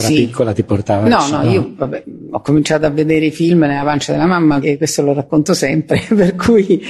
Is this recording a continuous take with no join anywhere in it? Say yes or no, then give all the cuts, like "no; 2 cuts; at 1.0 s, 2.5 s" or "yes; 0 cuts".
no; 1 cut; at 4.6 s